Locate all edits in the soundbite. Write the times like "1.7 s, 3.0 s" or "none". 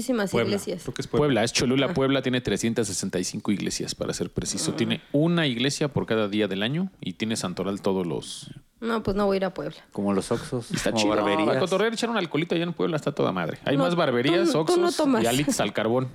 none